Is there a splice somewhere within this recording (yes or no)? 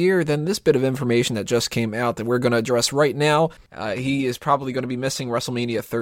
yes